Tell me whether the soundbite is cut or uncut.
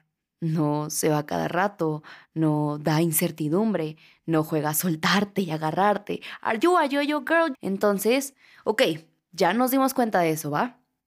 cut